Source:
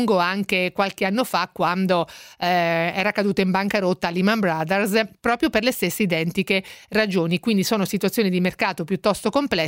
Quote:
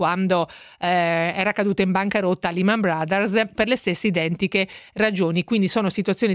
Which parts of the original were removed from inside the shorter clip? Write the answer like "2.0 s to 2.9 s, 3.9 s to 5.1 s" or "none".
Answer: 5.1 s to 5.5 s